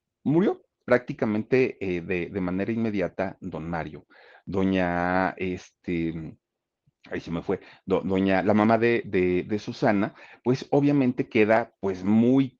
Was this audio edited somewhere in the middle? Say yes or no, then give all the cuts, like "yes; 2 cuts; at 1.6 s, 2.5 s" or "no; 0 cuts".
no; 0 cuts